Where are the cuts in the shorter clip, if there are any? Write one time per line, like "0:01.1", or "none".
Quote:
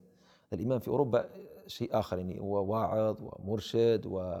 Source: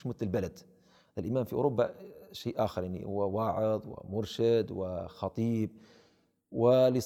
none